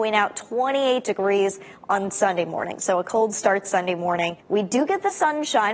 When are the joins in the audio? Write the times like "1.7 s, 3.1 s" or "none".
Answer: 4.4 s